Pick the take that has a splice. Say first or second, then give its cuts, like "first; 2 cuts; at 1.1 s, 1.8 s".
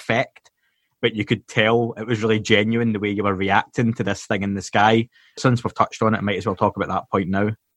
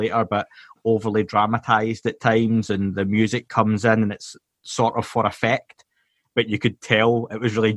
first; 1 cut; at 5.4 s